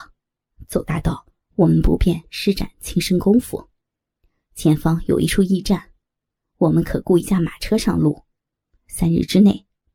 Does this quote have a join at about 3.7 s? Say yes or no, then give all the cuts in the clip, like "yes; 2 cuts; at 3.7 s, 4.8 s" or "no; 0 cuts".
no; 0 cuts